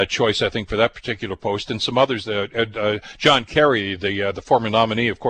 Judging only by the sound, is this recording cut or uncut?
uncut